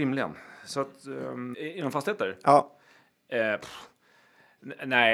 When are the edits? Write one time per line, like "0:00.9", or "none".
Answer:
0:01.5